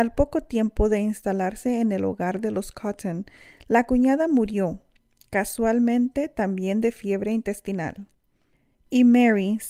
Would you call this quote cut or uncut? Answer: uncut